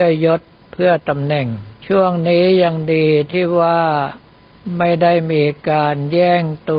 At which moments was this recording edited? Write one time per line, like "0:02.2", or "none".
0:01.8